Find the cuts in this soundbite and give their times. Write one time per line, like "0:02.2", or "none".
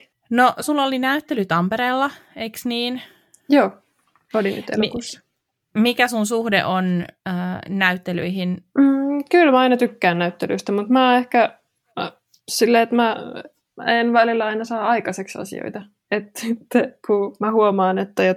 none